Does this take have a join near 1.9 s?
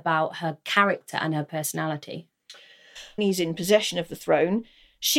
no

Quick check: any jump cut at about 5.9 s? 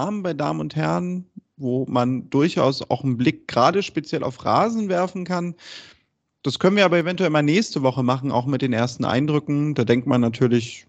no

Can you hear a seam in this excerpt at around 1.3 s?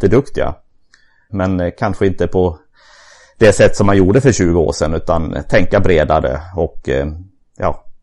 yes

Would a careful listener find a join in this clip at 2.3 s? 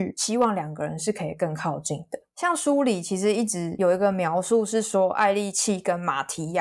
yes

